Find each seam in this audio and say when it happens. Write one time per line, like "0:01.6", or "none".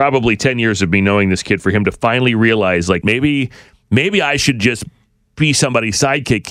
0:03.0

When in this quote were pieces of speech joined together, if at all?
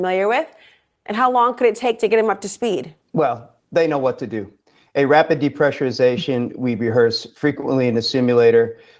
0:03.0

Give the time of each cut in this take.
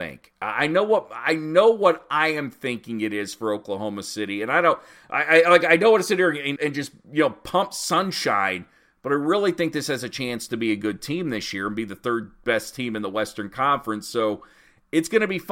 0:06.6

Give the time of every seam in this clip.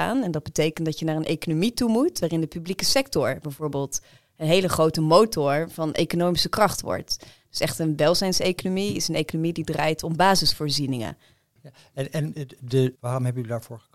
0:11.6
0:12.9

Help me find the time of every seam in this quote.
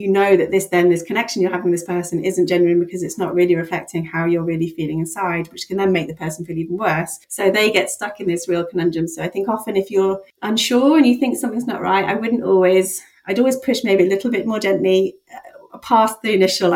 none

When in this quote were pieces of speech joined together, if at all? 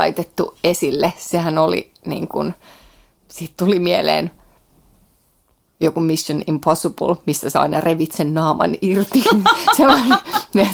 none

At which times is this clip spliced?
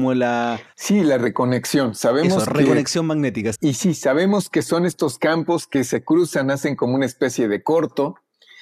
0:03.6

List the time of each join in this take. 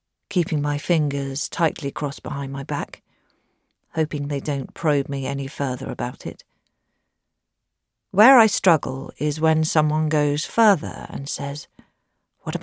none

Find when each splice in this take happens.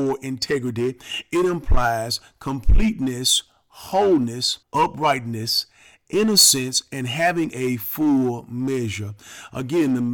0:04.6

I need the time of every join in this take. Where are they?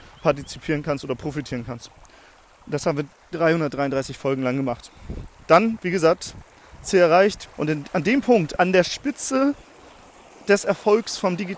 0:07.4
0:08.6

